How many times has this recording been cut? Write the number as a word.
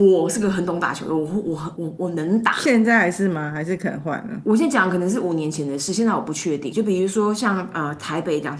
two